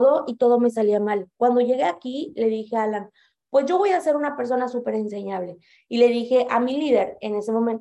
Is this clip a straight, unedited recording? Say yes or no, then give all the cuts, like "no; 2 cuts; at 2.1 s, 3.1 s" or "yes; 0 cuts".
yes; 0 cuts